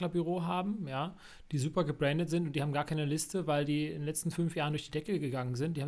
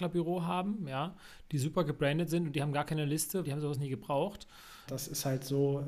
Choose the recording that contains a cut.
second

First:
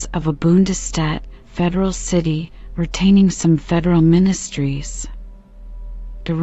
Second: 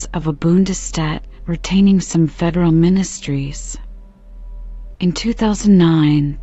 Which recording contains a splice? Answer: second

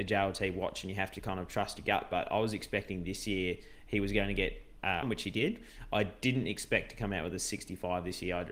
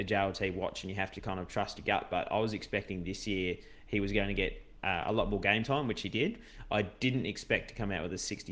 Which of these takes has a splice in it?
first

